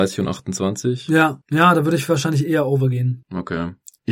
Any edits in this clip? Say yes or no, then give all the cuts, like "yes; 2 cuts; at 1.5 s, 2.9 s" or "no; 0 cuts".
no; 0 cuts